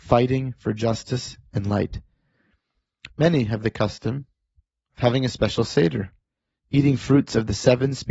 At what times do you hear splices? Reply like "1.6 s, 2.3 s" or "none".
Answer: 3.1 s